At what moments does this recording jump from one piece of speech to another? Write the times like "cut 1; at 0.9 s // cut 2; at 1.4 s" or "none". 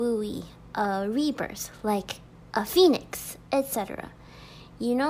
none